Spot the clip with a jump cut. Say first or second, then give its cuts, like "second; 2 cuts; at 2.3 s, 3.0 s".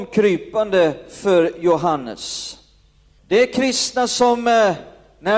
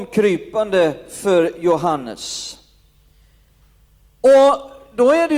first; 1 cut; at 3.2 s